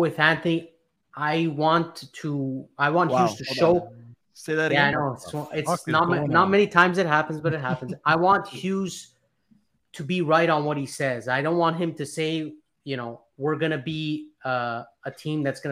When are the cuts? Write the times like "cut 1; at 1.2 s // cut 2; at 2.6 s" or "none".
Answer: none